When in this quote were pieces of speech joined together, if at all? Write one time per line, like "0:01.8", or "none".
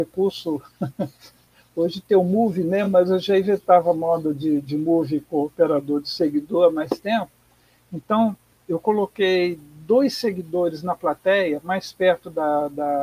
none

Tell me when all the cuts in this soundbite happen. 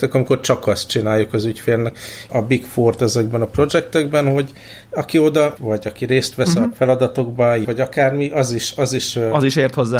0:02.3
0:05.6
0:07.6

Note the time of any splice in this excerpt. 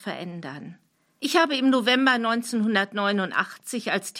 0:01.2

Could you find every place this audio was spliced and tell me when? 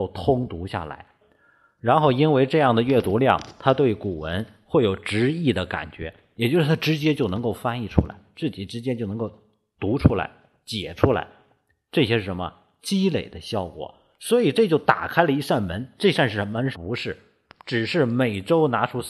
0:16.7

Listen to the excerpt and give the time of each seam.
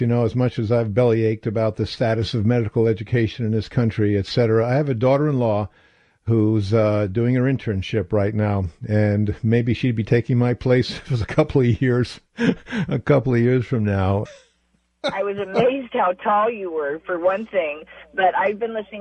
0:14.3

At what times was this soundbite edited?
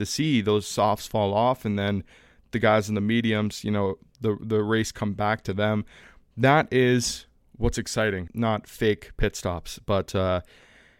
0:08.3

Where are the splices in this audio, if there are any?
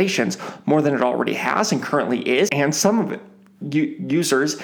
0:02.5

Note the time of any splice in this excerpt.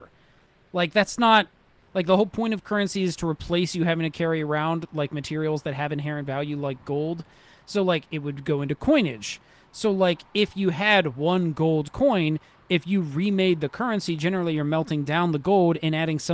0:01.8

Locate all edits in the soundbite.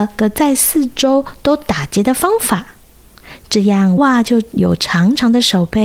0:04.0

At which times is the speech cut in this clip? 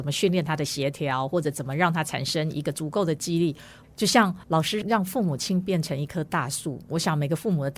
0:03.8

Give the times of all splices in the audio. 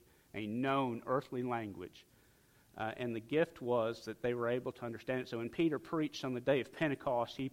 none

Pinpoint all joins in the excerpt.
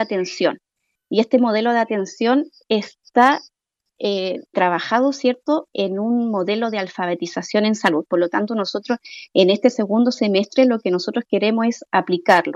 0:04.5

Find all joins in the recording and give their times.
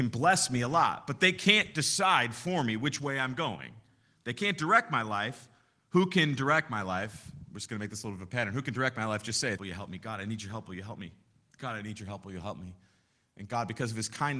0:09.6

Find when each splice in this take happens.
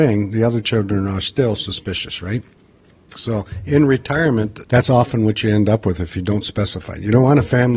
0:03.1
0:04.6

